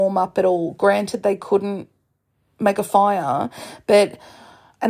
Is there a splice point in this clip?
no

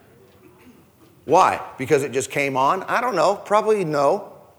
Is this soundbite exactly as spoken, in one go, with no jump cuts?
yes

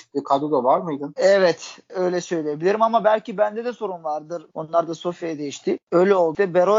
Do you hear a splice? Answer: yes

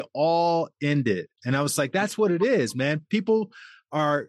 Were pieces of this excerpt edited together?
no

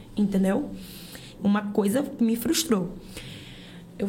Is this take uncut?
no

